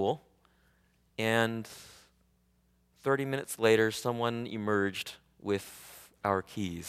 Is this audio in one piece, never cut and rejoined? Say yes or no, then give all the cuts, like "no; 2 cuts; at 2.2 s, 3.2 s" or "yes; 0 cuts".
yes; 0 cuts